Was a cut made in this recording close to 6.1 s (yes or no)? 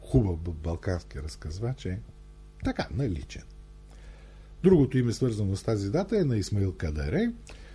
no